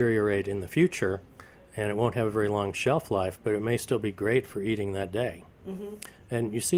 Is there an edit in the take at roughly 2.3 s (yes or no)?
no